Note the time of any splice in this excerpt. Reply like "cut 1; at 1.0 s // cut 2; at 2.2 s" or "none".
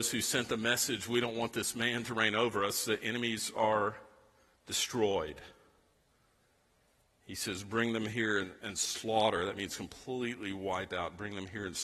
none